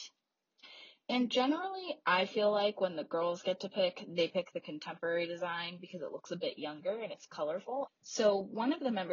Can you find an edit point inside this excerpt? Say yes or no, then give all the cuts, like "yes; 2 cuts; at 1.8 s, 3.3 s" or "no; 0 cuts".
yes; 1 cut; at 7.9 s